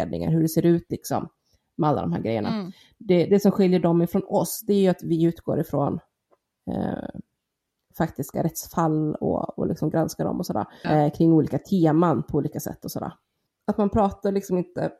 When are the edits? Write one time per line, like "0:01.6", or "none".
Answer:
0:10.8
0:13.5